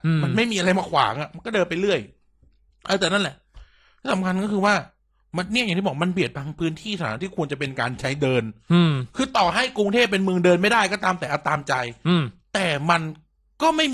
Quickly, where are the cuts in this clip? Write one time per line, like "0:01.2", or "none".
none